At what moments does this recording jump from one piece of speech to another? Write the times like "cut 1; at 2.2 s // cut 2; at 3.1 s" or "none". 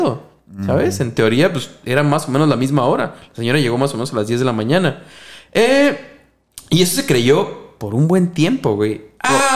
none